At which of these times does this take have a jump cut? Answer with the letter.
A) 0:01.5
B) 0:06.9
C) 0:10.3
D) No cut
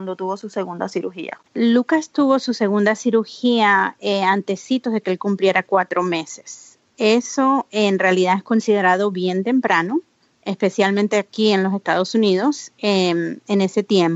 A